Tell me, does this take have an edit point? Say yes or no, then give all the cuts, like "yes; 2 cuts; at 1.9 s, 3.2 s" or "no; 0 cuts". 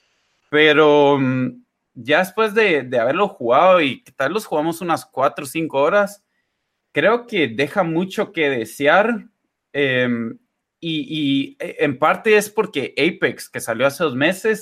no; 0 cuts